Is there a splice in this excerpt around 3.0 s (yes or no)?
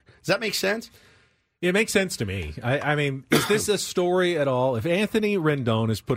no